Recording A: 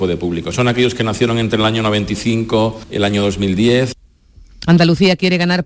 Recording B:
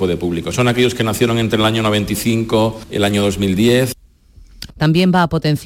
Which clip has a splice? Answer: B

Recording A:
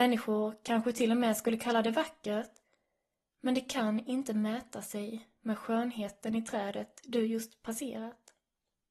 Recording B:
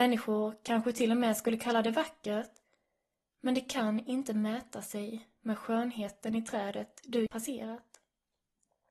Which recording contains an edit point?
B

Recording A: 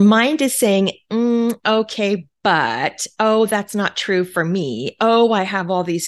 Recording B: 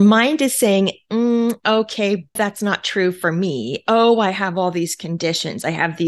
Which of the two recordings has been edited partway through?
B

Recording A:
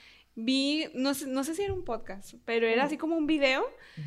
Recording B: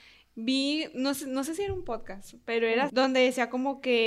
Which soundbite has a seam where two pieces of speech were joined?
B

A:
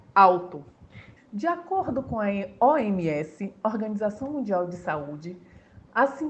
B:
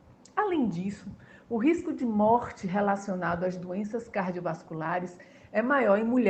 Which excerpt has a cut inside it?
A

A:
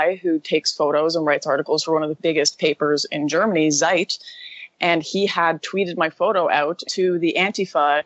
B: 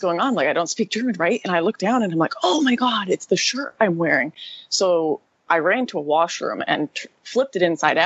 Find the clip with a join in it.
A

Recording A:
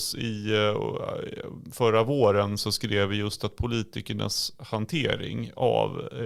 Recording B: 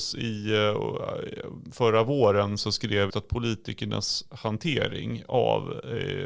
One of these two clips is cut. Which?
B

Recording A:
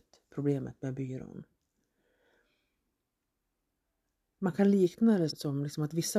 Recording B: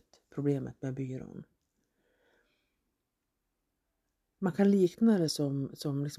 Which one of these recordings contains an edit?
A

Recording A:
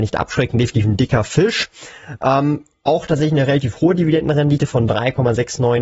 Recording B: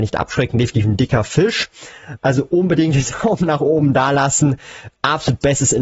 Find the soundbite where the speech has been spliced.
B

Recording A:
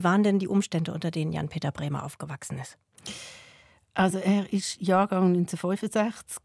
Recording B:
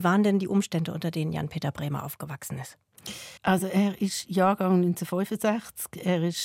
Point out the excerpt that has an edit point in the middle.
B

